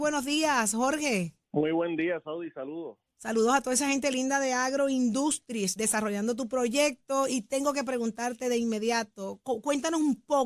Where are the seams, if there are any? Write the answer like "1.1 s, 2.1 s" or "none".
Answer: 1.4 s, 5.8 s, 9.4 s